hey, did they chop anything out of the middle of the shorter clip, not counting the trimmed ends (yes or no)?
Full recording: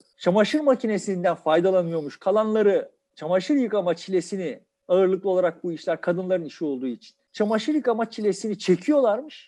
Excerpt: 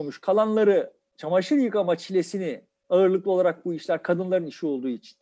no